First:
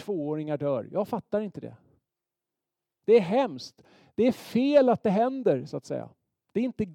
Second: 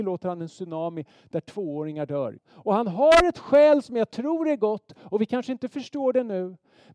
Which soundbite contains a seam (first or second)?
second